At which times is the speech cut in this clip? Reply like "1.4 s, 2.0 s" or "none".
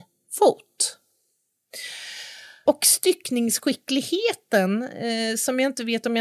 2.7 s